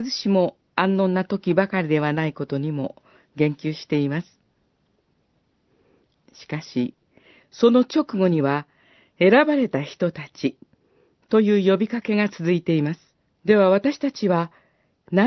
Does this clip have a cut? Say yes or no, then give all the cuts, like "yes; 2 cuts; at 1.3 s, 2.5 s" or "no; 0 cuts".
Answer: yes; 1 cut; at 13.3 s